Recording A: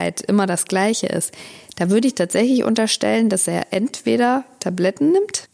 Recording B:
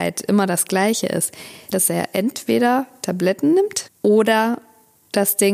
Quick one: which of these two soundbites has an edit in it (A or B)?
B